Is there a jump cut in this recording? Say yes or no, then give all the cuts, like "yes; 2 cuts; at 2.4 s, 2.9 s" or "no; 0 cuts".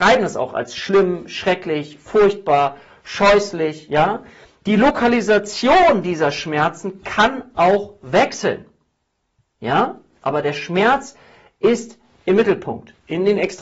no; 0 cuts